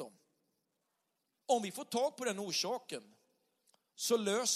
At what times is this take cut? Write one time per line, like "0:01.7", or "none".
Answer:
0:01.4